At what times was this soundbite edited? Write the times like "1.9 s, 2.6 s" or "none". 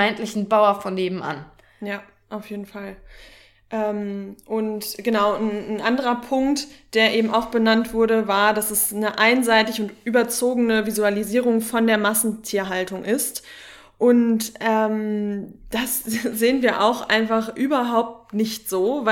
none